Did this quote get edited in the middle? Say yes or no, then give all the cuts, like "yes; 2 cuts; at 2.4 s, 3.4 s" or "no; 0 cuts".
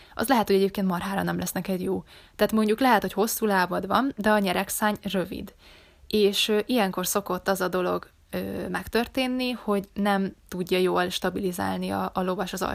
no; 0 cuts